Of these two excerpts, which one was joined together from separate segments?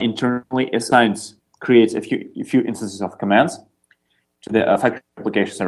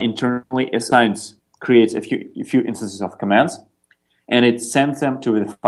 first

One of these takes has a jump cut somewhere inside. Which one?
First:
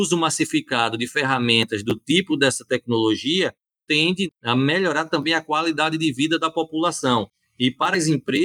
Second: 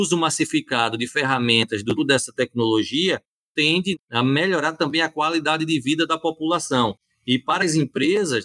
second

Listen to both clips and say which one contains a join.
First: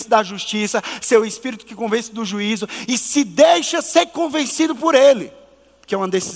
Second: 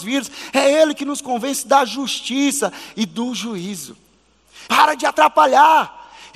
second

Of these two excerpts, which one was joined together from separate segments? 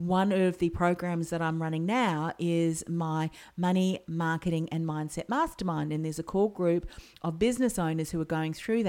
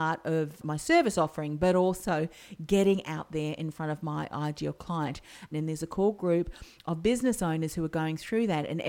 second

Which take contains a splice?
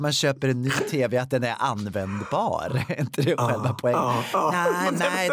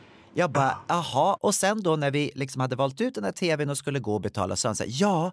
second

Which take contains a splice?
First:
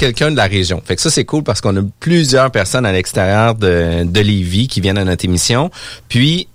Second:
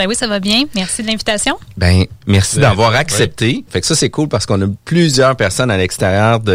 second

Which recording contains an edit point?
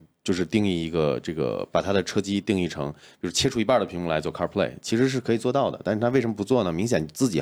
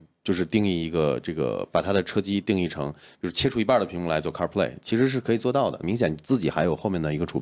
second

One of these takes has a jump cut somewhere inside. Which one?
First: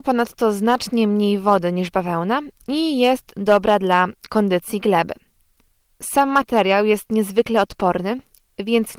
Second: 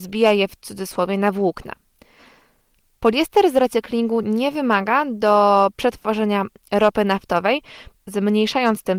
second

